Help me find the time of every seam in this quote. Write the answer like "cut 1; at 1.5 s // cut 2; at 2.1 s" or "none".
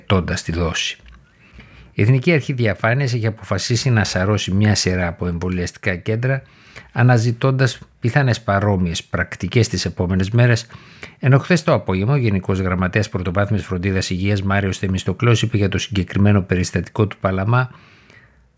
none